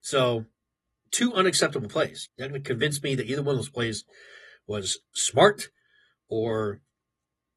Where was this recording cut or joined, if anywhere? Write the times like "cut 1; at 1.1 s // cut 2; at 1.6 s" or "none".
cut 1; at 2.3 s